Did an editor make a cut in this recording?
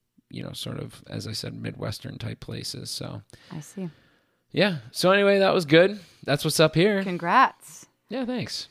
no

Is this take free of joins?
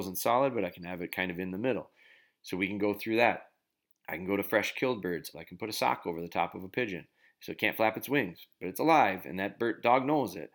no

